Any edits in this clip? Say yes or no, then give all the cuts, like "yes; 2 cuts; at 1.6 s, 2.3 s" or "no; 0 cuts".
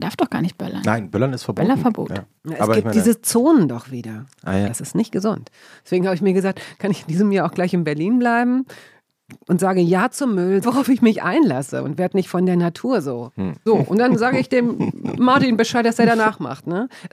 yes; 3 cuts; at 4.7 s, 10.6 s, 13.7 s